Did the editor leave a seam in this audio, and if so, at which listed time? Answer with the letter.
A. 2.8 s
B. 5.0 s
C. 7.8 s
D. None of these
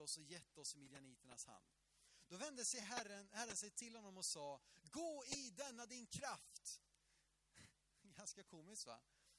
D